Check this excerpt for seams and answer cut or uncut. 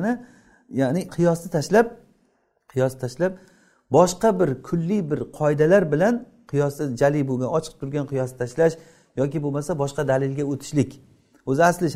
uncut